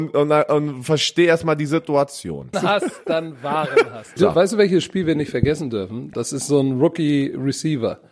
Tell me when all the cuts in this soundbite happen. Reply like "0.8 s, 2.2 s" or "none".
2.5 s, 4.2 s, 6.1 s